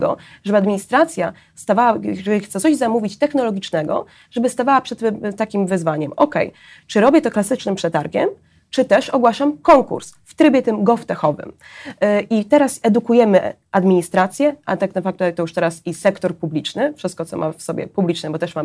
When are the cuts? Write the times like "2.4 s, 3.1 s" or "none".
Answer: none